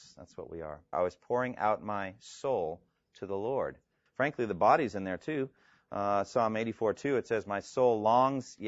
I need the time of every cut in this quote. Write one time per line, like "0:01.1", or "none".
0:00.9
0:04.1